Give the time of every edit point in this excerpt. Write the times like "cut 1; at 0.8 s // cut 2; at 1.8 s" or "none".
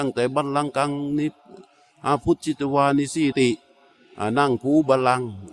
cut 1; at 3.3 s